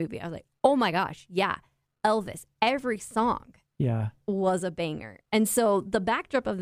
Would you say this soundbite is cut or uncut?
uncut